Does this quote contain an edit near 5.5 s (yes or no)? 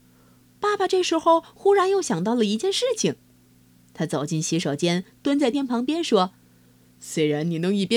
yes